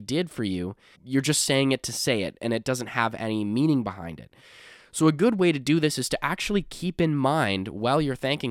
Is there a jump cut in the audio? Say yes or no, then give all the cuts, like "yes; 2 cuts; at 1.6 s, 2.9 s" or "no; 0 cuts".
yes; 1 cut; at 0.9 s